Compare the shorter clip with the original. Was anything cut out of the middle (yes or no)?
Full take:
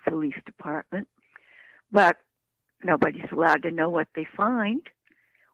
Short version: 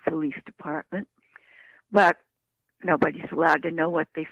no